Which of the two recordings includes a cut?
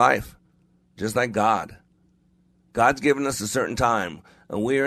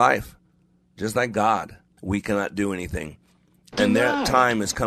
second; 1 cut; at 2.0 s

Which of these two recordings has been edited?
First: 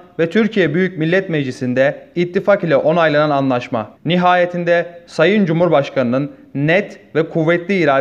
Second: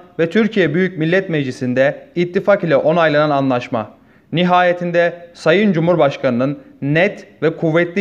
first; 1 cut; at 4.0 s

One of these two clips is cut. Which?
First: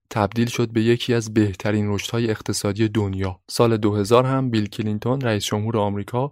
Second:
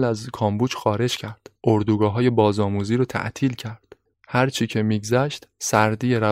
first; 1 cut; at 3.4 s

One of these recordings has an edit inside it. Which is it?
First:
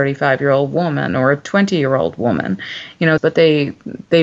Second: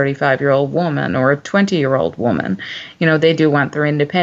first; 1 cut; at 3.2 s

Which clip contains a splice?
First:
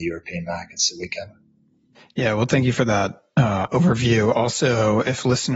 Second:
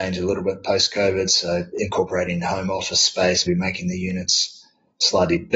second; 2 cuts; at 1.7 s, 3.5 s

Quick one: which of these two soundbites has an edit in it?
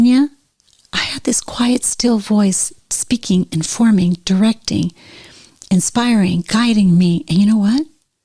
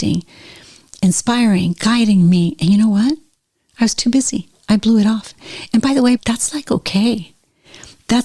second; 1 cut; at 6.2 s

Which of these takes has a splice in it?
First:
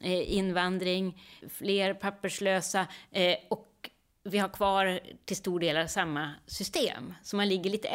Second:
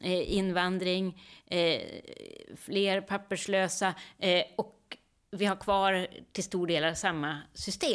first; 1 cut; at 1.4 s

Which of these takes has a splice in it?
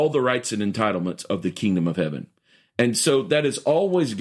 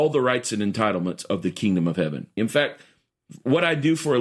second; 1 cut; at 2.4 s

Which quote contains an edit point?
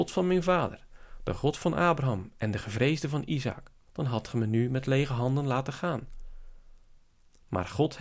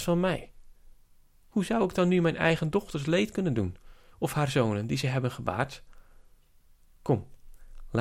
first; 1 cut; at 3.9 s

